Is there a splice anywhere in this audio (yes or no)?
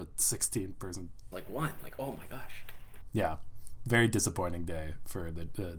yes